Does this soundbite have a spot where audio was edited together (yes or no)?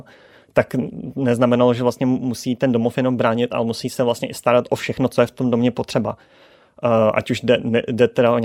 no